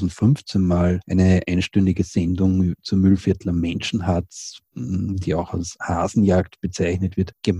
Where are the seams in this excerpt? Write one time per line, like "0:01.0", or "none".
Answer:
none